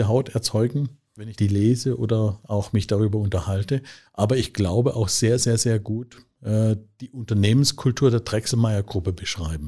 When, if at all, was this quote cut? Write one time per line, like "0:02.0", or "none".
none